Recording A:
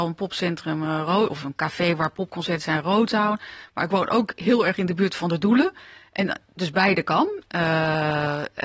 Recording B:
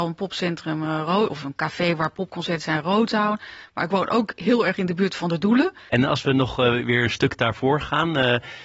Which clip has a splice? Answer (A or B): B